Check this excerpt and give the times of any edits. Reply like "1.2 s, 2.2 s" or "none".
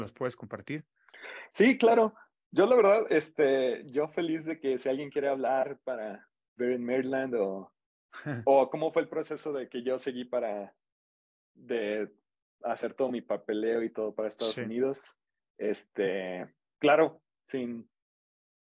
none